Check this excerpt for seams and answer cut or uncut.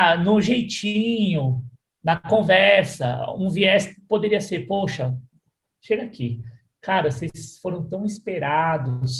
uncut